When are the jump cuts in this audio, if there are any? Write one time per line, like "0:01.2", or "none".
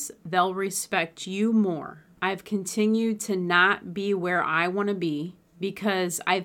0:02.2

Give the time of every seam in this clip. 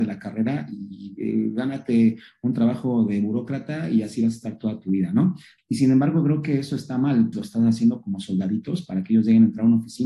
0:05.6
0:07.3

